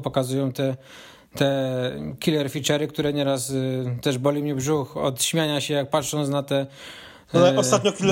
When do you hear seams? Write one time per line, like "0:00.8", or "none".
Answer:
none